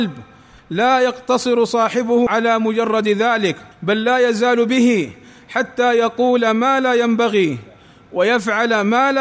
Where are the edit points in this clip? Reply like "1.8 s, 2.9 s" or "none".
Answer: 3.7 s